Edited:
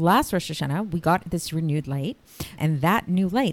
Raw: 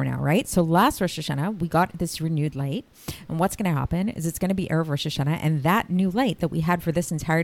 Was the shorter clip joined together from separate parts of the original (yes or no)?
yes